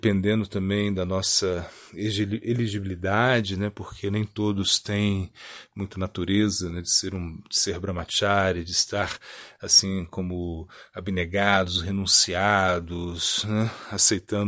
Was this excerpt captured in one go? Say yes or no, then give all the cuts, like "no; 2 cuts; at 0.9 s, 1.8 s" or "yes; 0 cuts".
yes; 0 cuts